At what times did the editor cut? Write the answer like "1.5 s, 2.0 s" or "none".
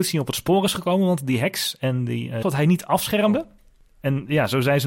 2.4 s